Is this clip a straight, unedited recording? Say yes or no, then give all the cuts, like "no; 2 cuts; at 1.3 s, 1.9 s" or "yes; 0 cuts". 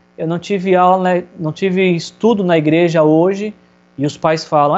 yes; 0 cuts